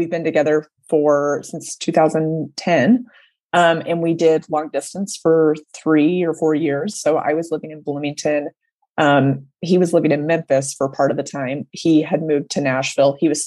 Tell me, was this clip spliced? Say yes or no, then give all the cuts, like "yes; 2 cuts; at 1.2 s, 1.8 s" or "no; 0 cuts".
no; 0 cuts